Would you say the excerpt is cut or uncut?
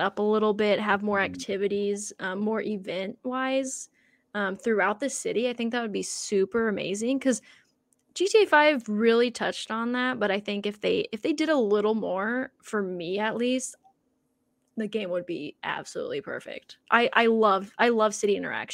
uncut